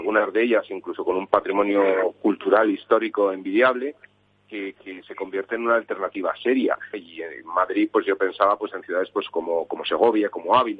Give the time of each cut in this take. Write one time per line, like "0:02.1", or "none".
0:06.9